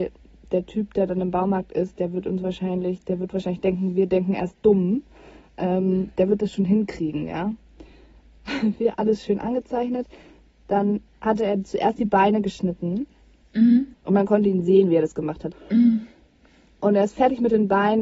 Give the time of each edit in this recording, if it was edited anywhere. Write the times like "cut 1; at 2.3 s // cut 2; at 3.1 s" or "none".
cut 1; at 13.9 s // cut 2; at 15.5 s